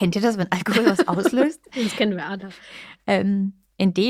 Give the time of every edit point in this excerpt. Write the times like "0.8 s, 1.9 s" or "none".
none